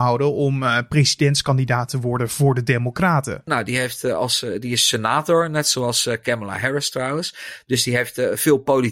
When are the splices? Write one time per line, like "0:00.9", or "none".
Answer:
0:03.5